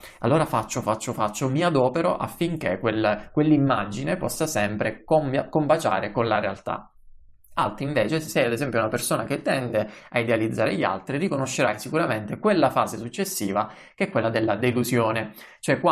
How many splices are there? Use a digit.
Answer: 0